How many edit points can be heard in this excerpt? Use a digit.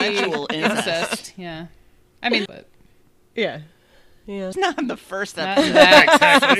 2